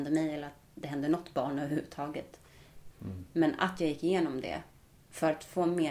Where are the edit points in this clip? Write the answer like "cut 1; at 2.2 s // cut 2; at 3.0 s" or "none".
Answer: cut 1; at 2.9 s